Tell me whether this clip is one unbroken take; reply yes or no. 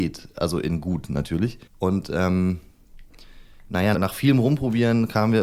no